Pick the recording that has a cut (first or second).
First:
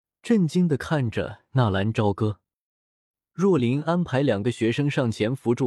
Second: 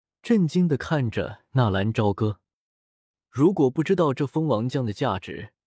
first